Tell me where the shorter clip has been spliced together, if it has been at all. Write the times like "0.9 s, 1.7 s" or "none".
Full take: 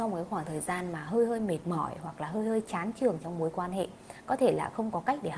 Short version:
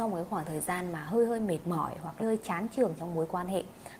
2.2 s